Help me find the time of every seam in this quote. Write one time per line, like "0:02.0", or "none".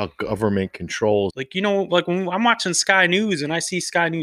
0:01.3